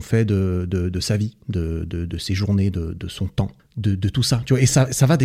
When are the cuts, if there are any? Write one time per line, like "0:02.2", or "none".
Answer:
0:03.6